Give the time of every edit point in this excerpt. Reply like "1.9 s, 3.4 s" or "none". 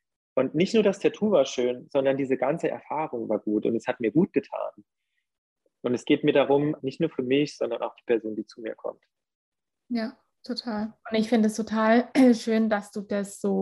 6.8 s